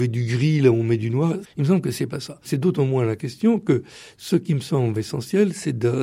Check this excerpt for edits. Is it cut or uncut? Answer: cut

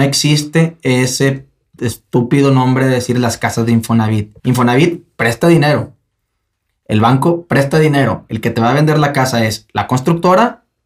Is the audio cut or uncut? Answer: cut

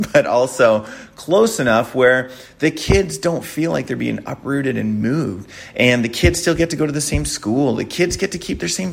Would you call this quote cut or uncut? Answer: uncut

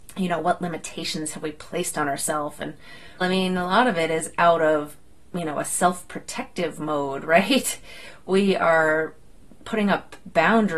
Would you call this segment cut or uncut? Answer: cut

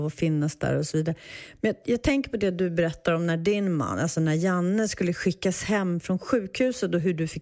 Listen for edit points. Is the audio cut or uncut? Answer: uncut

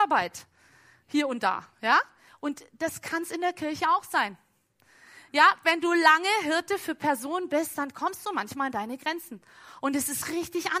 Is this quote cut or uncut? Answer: uncut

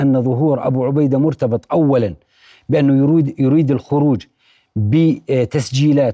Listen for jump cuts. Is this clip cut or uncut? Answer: uncut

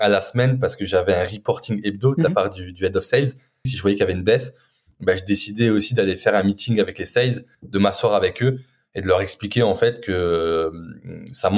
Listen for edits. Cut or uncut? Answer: cut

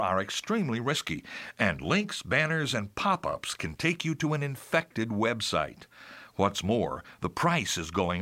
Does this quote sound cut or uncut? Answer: uncut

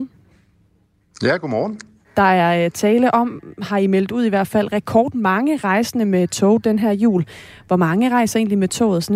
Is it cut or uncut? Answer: uncut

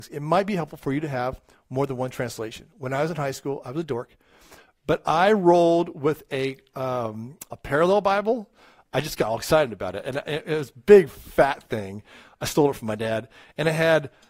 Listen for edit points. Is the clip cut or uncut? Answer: uncut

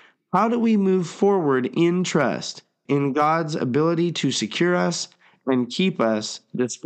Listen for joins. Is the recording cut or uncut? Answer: cut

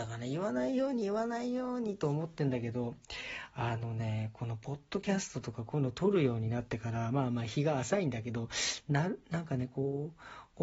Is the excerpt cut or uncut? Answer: uncut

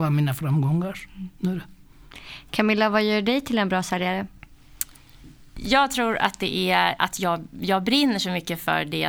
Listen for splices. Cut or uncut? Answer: cut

